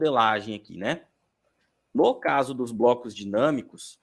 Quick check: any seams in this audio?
no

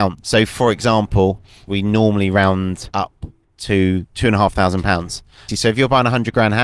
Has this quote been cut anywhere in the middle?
yes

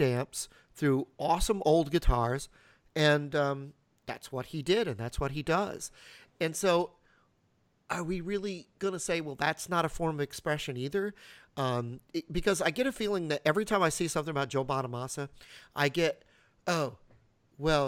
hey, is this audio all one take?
yes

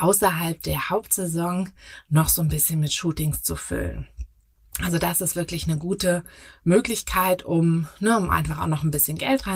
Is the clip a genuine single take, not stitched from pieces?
yes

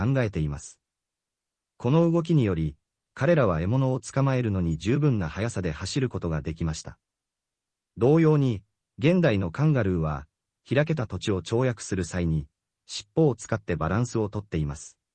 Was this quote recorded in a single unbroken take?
yes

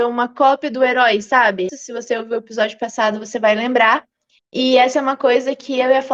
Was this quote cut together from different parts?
yes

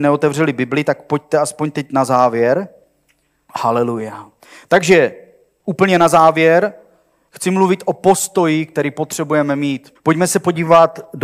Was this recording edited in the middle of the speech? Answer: yes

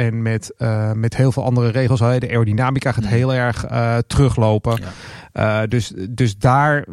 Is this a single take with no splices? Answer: yes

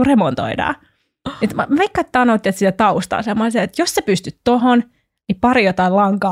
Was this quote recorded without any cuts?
yes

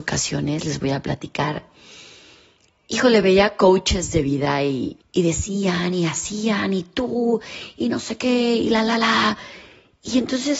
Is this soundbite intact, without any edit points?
no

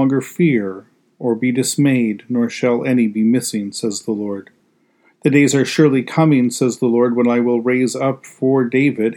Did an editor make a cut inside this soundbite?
no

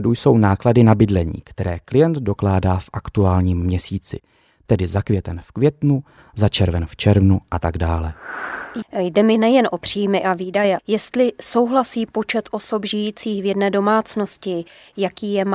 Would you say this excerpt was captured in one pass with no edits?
no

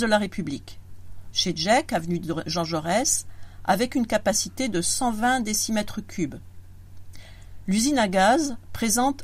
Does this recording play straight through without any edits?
no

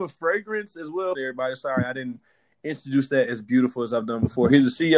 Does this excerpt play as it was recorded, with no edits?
no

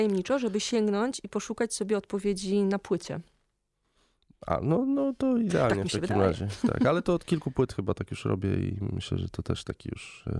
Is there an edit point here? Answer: no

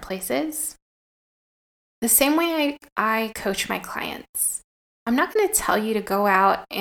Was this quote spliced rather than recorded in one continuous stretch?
yes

